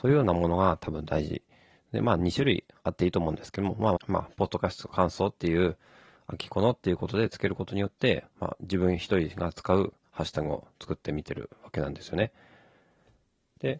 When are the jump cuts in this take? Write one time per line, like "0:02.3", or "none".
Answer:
0:04.0